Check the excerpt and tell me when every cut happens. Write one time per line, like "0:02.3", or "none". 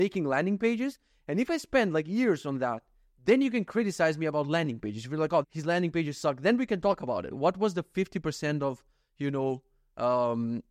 0:05.4
0:07.3